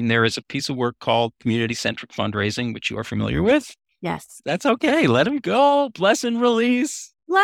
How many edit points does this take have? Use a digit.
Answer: 1